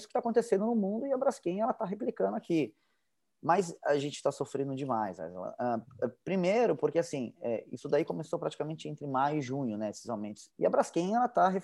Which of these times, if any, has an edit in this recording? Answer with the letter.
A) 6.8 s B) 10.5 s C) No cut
B